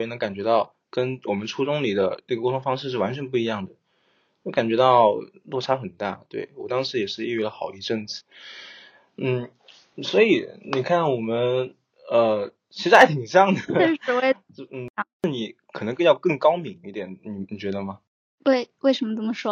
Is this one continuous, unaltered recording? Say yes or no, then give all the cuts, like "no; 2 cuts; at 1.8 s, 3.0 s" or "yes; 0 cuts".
yes; 0 cuts